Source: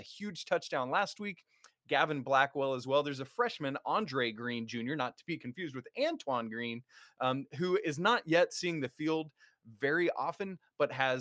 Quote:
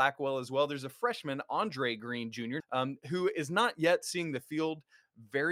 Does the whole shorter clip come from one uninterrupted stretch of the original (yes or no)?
no